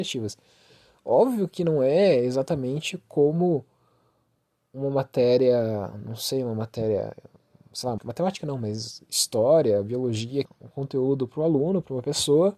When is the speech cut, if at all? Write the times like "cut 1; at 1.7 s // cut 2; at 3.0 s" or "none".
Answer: cut 1; at 8.0 s // cut 2; at 10.4 s